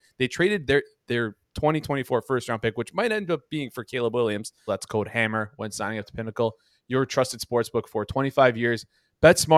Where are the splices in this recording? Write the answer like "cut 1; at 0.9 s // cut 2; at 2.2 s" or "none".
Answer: cut 1; at 4.7 s